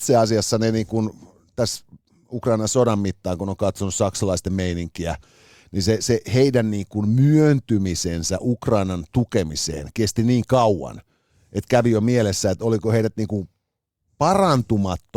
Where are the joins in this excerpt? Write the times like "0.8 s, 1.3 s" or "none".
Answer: none